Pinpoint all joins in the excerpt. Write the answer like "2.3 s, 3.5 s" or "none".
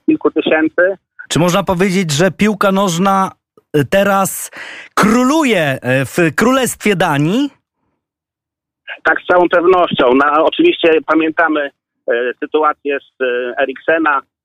1.3 s